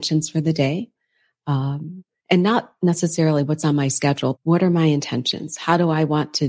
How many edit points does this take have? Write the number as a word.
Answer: one